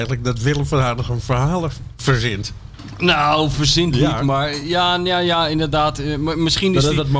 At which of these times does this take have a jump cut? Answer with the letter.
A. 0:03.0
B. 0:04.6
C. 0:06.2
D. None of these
D